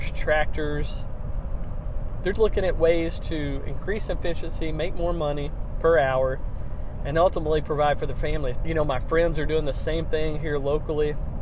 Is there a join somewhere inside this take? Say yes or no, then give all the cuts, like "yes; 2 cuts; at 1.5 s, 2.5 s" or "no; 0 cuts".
yes; 2 cuts; at 2.3 s, 8.6 s